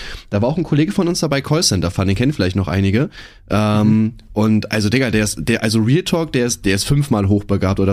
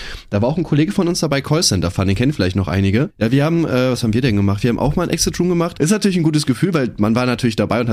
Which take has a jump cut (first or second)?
second